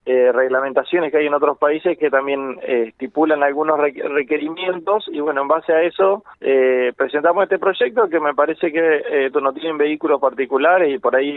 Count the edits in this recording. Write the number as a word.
two